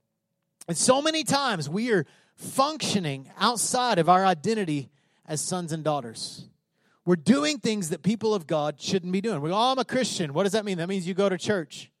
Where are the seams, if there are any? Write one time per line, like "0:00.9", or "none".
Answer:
none